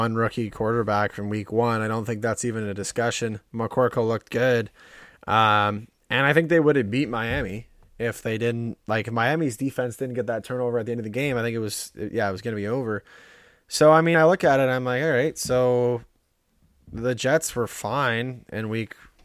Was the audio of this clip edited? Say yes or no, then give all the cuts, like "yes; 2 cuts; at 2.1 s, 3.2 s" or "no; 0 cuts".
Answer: no; 0 cuts